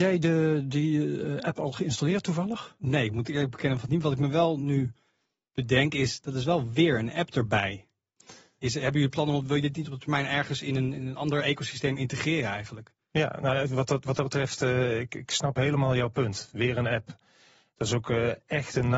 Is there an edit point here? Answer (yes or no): no